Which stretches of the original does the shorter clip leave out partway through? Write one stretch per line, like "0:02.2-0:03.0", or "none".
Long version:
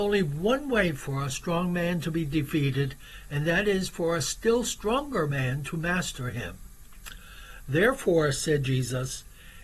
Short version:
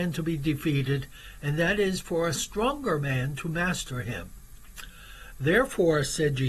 0:04.2-0:04.6

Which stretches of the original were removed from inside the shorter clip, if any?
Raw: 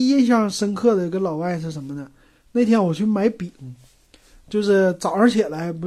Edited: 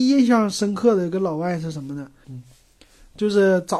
0:02.2-0:03.6

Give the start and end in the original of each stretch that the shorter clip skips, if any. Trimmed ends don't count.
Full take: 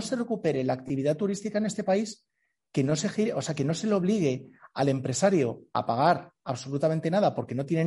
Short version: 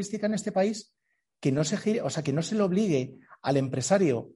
none

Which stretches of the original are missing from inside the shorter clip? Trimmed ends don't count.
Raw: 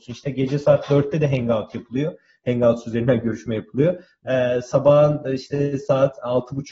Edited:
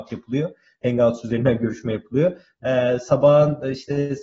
none

